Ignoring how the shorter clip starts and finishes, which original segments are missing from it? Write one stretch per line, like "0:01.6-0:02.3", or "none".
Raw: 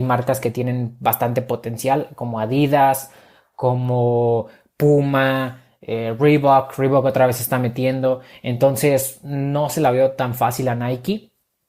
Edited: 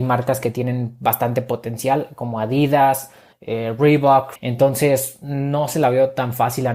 0:03.3-0:05.7
0:06.8-0:08.4